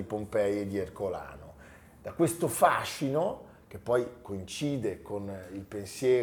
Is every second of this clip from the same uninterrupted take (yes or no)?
yes